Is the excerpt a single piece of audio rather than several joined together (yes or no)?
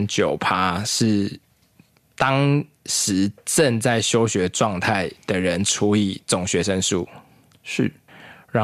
yes